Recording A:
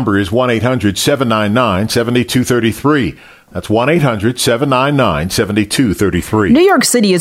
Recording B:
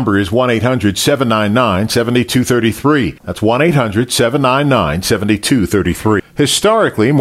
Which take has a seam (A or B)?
B